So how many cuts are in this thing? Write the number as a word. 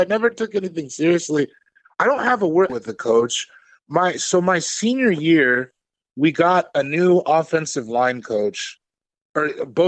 one